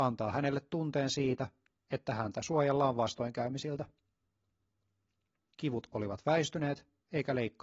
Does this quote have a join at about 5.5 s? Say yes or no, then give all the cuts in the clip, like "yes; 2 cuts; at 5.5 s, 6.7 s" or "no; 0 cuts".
yes; 1 cut; at 5.5 s